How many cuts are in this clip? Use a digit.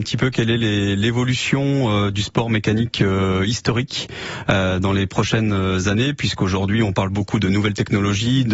0